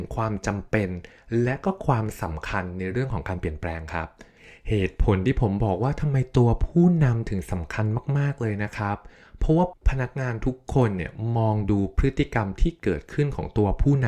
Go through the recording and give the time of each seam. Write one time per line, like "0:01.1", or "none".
none